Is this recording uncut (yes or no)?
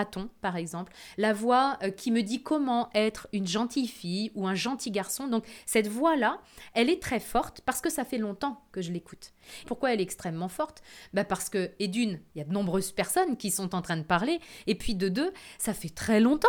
no